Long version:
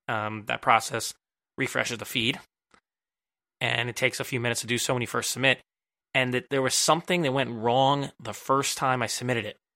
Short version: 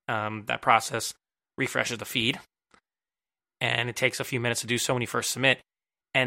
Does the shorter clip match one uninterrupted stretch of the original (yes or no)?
yes